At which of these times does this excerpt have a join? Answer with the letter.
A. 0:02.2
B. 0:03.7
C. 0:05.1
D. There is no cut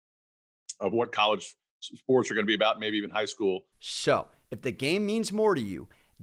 B